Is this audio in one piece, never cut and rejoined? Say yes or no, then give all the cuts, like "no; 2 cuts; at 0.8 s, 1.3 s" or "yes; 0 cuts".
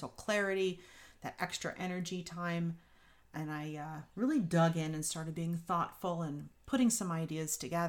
yes; 0 cuts